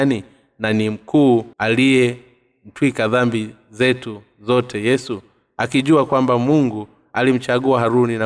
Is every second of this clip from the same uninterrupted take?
no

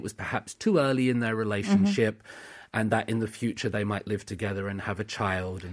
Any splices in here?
no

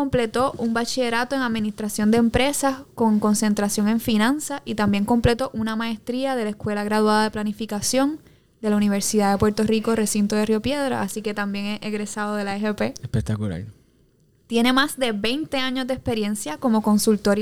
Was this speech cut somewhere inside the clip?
no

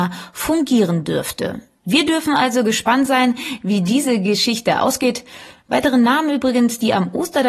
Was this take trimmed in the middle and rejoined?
no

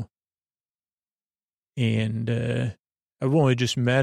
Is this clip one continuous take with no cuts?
yes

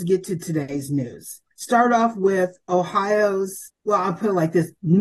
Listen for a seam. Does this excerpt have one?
yes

